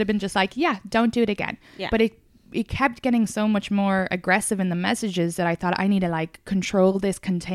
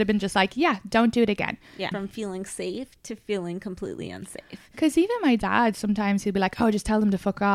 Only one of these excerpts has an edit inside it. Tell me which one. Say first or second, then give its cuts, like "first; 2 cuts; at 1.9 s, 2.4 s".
second; 1 cut; at 1.9 s